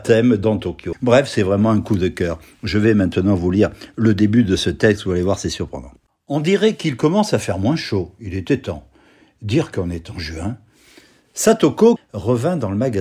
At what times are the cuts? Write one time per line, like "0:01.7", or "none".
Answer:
0:00.9
0:12.0